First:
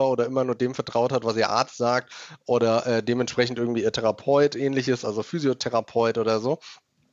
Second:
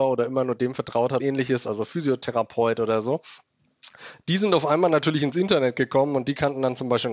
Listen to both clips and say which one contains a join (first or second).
second